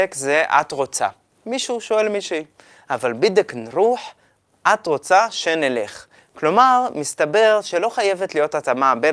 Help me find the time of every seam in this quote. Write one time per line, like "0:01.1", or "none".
none